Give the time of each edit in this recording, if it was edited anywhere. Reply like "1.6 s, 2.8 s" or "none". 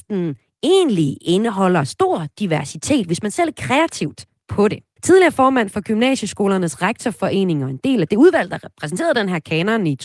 5.0 s

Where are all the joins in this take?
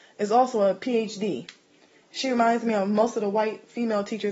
none

